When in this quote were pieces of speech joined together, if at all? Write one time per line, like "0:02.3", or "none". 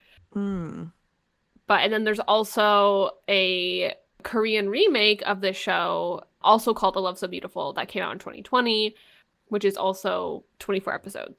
none